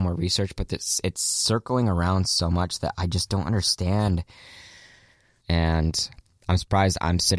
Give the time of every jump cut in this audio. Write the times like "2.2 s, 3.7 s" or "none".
5.4 s

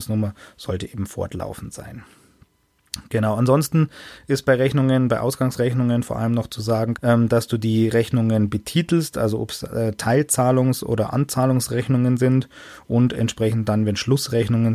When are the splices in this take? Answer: 7.0 s

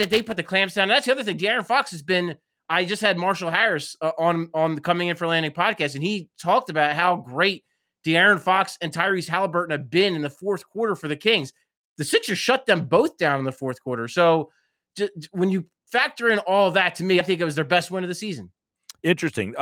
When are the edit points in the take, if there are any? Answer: 17.2 s

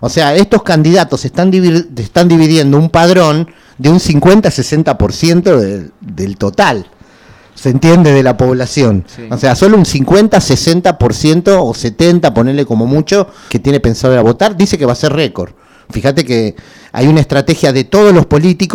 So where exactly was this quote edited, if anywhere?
9.6 s, 13.5 s

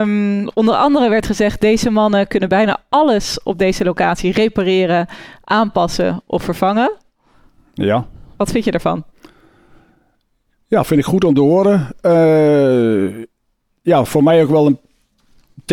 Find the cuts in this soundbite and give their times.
none

